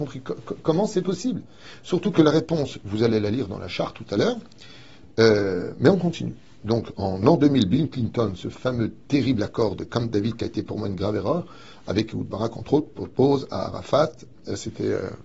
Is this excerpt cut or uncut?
uncut